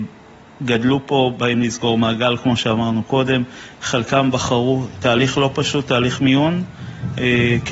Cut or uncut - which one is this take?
uncut